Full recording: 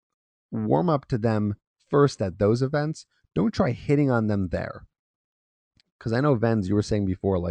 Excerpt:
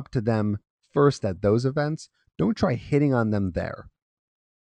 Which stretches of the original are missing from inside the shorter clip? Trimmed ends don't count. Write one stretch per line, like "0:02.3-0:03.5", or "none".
none